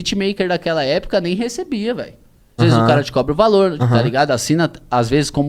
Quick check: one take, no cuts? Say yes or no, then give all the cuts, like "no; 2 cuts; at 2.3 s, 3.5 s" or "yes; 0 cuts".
no; 2 cuts; at 2.6 s, 3.8 s